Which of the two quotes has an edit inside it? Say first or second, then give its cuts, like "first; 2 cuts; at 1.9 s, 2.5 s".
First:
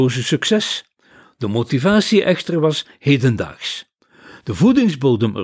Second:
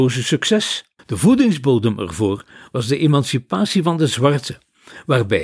second; 1 cut; at 1.0 s